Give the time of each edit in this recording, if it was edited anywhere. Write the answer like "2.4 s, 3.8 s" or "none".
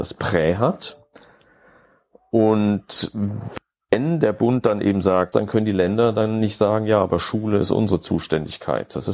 5.3 s

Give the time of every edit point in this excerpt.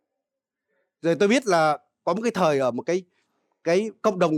none

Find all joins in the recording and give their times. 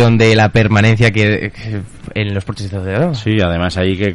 none

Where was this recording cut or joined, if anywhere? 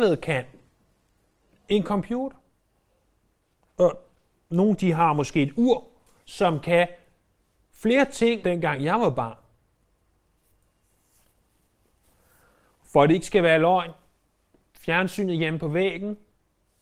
8.4 s

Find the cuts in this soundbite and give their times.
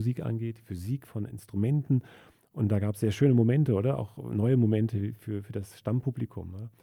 none

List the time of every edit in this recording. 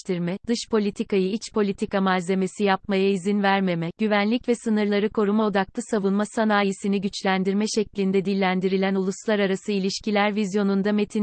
none

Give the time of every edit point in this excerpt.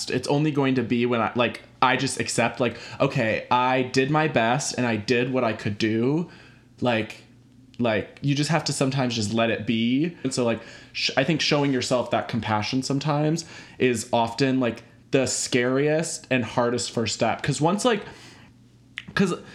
10.2 s

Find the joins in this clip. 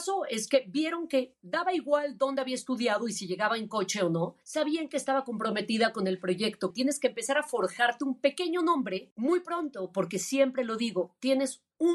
6.7 s

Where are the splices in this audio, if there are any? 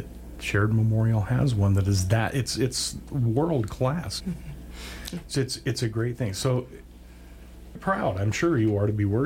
4.2 s, 7.8 s

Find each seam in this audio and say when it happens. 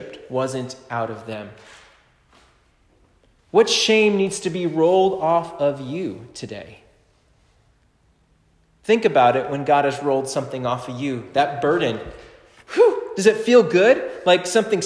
3.4 s

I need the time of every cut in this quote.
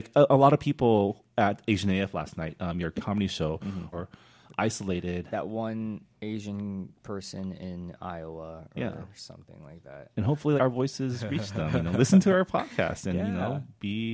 3.9 s, 10.6 s

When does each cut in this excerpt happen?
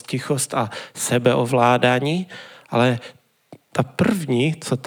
none

